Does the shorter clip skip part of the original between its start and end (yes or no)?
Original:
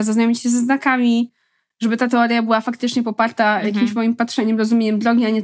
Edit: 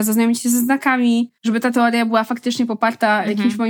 yes